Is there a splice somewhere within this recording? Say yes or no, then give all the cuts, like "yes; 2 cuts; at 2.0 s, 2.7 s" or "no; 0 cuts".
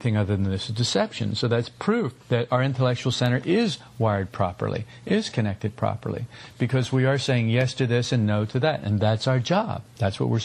no; 0 cuts